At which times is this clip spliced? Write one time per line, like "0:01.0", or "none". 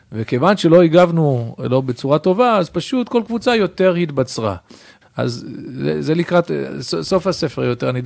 0:05.0